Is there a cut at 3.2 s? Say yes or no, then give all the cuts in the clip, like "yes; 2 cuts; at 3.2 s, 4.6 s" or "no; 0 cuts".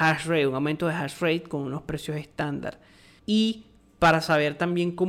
yes; 1 cut; at 3.2 s